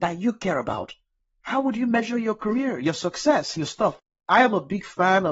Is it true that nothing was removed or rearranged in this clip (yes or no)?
yes